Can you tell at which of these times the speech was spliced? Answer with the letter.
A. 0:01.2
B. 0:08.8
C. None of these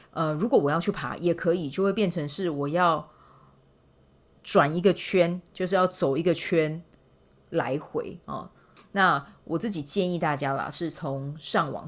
B